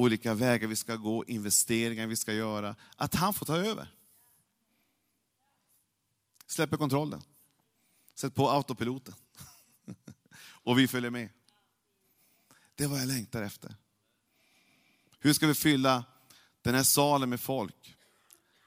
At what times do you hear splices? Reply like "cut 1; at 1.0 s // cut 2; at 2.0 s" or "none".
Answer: none